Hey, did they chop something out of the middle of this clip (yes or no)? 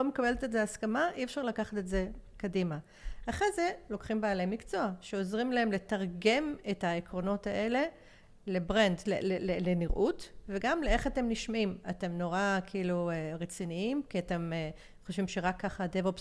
no